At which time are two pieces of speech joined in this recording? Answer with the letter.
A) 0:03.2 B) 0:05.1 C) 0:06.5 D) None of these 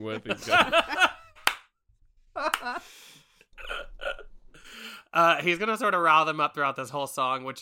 D